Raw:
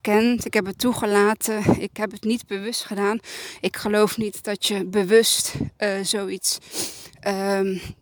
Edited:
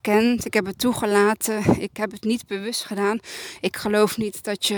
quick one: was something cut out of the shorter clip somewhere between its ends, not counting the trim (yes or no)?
no